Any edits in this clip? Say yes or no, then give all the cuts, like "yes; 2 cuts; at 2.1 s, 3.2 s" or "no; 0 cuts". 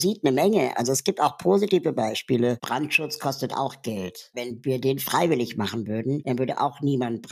yes; 1 cut; at 2.6 s